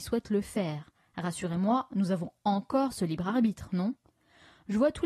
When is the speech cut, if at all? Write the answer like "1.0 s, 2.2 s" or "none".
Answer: none